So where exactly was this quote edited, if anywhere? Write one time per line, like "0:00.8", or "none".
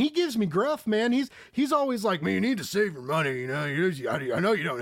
none